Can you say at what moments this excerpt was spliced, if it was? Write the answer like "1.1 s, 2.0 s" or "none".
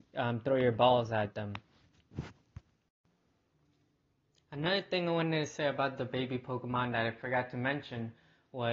none